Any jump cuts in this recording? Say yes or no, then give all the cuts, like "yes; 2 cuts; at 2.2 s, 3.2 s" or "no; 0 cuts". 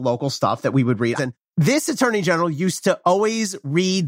yes; 1 cut; at 1.2 s